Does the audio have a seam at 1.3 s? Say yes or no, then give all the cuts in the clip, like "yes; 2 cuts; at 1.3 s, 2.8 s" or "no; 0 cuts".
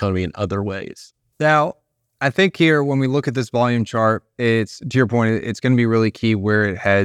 yes; 1 cut; at 1.3 s